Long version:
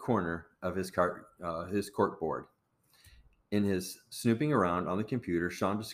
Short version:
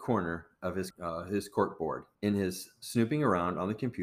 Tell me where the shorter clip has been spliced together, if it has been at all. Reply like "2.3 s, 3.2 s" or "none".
0.9 s, 2.1 s